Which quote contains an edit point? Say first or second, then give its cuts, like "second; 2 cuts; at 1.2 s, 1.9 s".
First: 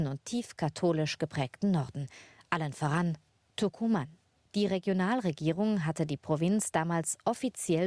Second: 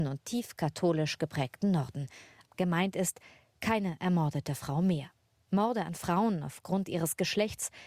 second; 1 cut; at 2.5 s